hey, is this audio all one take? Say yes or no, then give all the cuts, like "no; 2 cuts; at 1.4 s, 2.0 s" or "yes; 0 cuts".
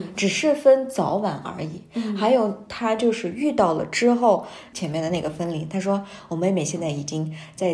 no; 1 cut; at 4.7 s